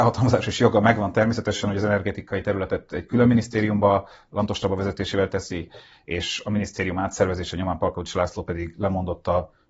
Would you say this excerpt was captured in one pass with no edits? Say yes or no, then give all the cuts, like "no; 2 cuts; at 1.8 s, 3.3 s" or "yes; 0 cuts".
yes; 0 cuts